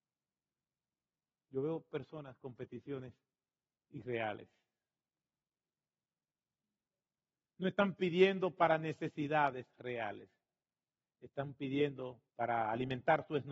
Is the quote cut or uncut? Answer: cut